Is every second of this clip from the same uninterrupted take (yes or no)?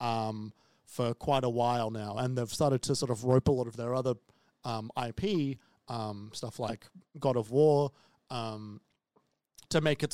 yes